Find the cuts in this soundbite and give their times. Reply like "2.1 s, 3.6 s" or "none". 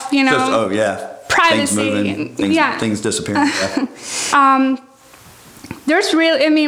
4.3 s